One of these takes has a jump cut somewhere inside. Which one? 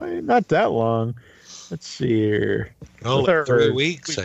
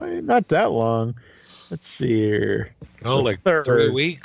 first; 1 cut; at 3.2 s

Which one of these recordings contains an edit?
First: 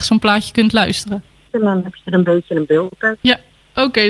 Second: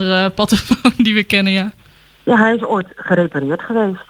first; 2 cuts; at 1.5 s, 3.2 s

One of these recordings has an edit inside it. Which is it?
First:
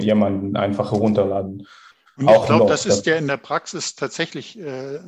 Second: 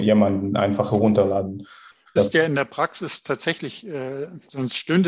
second; 1 cut; at 2.2 s

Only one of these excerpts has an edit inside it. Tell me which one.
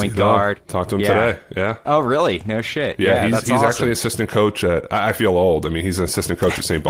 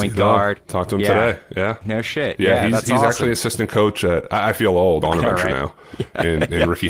second; 2 cuts; at 1.8 s, 5.0 s

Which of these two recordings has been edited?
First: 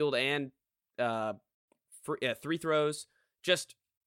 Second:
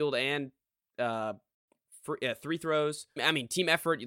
second; 1 cut; at 3.2 s

